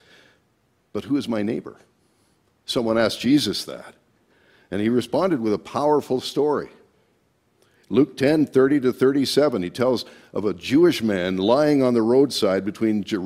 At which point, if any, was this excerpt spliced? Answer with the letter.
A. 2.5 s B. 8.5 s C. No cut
C